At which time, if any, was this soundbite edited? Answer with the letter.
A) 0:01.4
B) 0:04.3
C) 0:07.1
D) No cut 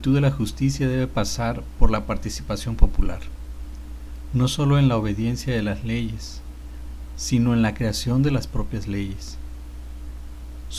C